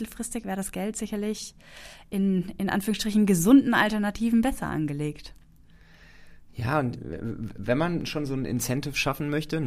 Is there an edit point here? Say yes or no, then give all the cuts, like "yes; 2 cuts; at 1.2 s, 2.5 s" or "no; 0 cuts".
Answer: no; 0 cuts